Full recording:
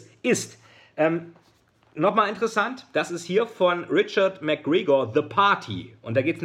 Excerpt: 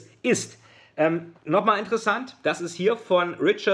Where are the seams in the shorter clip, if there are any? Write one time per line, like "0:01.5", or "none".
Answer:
0:01.4